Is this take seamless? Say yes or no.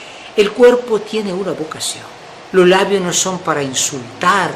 no